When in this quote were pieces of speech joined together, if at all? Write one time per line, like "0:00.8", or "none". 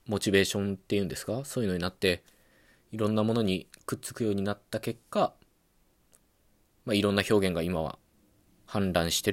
none

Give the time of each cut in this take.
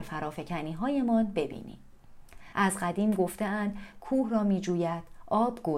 0:02.5
0:04.0

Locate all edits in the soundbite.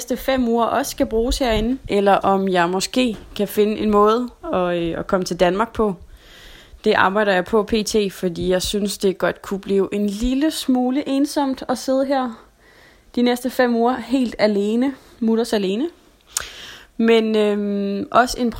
none

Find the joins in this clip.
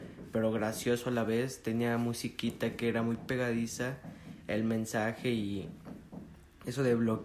none

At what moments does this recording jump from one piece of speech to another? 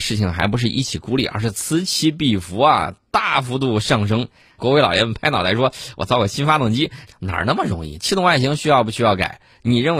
0:04.6
0:07.1

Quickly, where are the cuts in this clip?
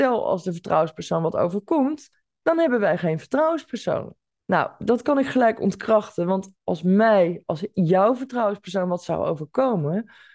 none

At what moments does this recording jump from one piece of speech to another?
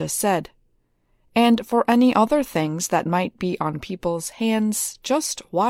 none

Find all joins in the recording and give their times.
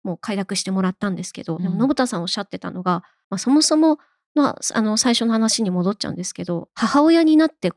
none

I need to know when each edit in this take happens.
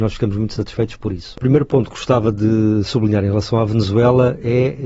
0:01.4

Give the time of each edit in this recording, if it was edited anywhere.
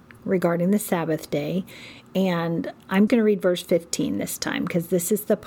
0:03.1

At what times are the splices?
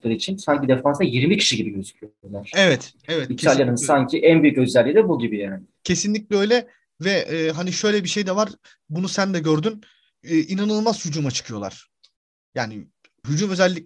none

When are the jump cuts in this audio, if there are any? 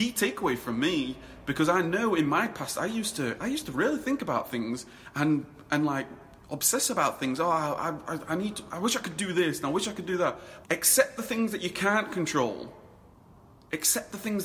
0:06.4
0:10.6

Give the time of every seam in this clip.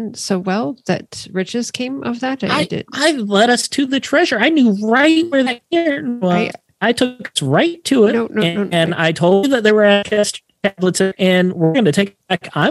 none

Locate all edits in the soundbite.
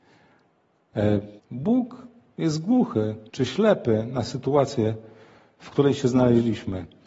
0:01.4
0:03.3

